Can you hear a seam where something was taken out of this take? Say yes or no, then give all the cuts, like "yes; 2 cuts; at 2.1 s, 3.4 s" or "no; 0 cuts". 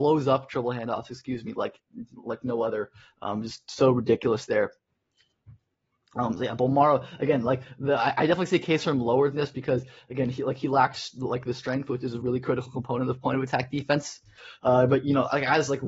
no; 0 cuts